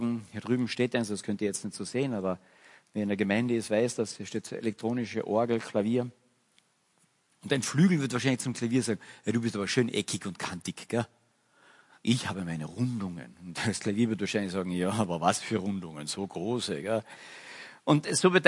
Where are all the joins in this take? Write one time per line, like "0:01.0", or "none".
none